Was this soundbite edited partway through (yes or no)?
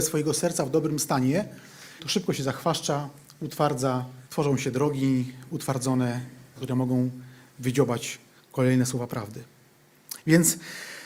yes